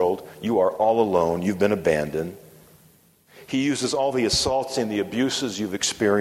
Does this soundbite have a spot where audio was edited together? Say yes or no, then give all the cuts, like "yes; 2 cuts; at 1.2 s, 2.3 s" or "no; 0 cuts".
no; 0 cuts